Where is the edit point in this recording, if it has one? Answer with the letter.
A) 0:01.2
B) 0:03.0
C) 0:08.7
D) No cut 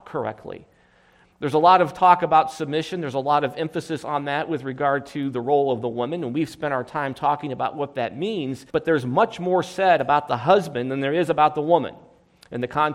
C